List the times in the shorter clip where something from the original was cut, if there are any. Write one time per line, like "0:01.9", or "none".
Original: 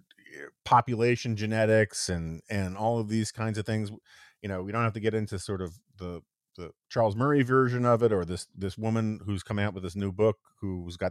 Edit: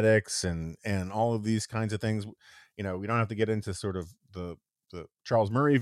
none